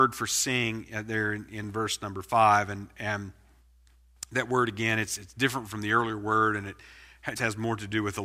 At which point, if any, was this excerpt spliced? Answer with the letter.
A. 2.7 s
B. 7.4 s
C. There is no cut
B